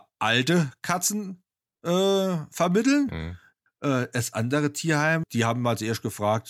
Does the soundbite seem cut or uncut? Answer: cut